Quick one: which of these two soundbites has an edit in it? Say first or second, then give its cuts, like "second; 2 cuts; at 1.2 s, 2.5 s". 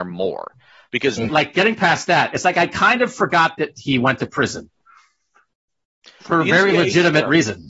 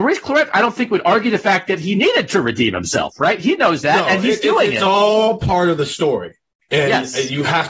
first; 1 cut; at 1.3 s